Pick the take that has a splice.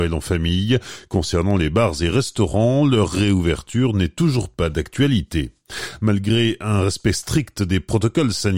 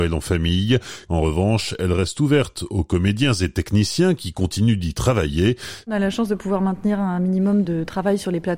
second; 2 cuts; at 1.1 s, 5.8 s

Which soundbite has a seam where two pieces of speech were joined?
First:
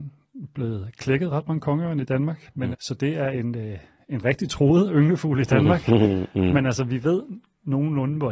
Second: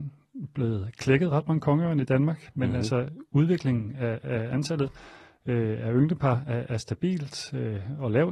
first; 1 cut; at 2.7 s

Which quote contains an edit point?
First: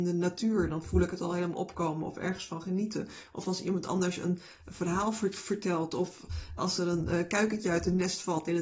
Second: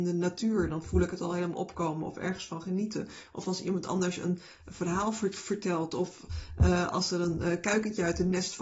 first; 1 cut; at 6.6 s

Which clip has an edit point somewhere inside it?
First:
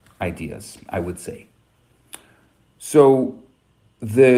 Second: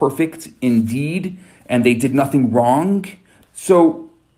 second; 1 cut; at 3.4 s

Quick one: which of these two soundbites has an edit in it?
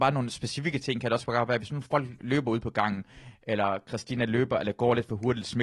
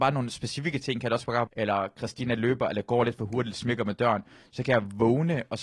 second; 1 cut; at 1.5 s

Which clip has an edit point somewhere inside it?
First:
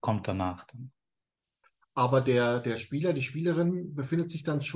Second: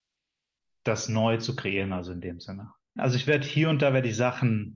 second; 1 cut; at 3.0 s

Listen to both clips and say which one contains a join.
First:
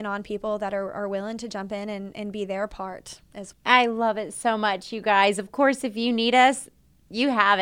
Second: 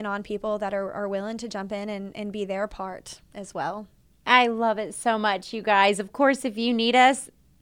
first; 1 cut; at 3.5 s

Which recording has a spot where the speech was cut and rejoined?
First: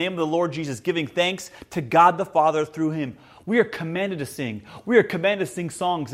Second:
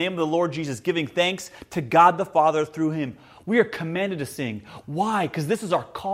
second; 1 cut; at 4.8 s

